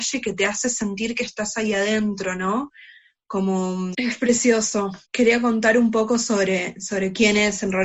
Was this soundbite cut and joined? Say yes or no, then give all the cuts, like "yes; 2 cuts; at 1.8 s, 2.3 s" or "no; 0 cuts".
yes; 2 cuts; at 3.9 s, 5.0 s